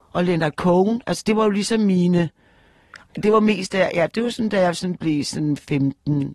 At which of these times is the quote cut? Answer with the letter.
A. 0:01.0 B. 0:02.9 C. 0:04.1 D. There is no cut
D